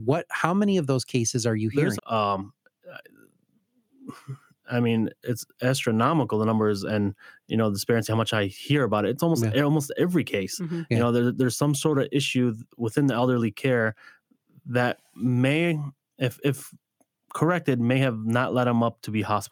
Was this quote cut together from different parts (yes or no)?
yes